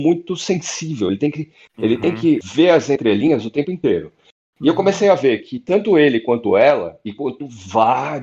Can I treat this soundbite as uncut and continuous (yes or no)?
yes